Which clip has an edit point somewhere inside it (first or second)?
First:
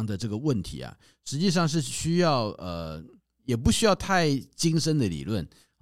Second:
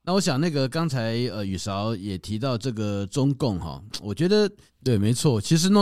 second